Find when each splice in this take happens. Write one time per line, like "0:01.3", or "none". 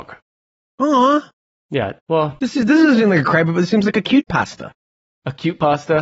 none